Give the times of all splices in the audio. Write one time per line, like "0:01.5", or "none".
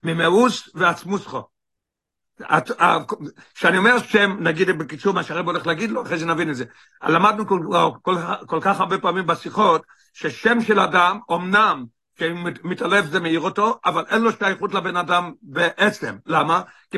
none